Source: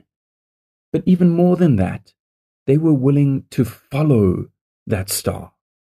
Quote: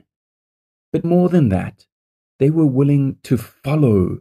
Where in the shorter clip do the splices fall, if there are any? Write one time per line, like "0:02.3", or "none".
0:01.0